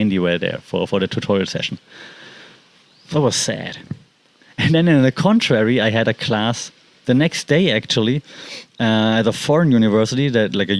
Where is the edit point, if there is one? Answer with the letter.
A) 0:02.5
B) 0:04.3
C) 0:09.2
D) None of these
D